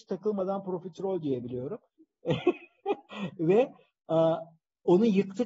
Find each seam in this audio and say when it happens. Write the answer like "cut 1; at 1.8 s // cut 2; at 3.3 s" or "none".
cut 1; at 1.9 s